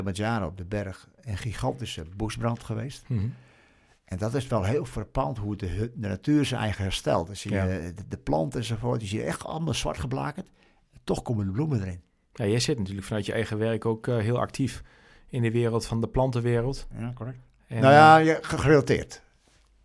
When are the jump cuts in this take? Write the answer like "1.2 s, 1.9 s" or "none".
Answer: none